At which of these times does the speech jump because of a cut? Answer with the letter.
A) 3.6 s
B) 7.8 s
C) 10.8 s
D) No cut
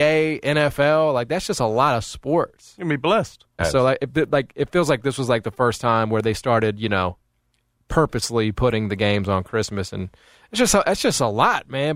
A